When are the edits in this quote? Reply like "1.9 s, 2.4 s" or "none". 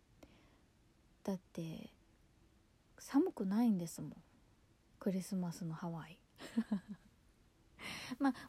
none